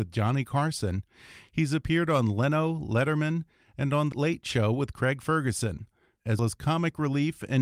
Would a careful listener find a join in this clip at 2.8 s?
no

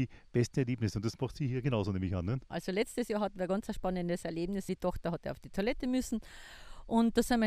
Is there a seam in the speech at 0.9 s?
no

